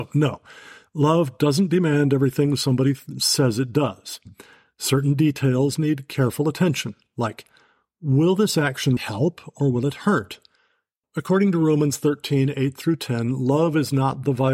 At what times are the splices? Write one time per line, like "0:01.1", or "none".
0:09.0
0:11.0